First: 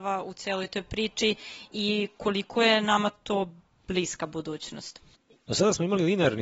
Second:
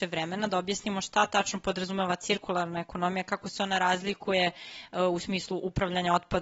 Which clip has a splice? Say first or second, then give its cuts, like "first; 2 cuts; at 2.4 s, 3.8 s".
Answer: first; 1 cut; at 5.4 s